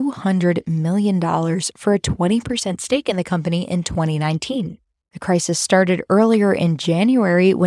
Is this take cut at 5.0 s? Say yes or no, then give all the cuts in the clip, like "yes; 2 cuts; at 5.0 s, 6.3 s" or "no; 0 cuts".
yes; 1 cut; at 5.0 s